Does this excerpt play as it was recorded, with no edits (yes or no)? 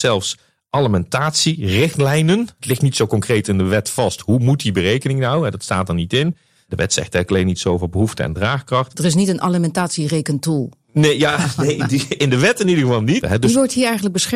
no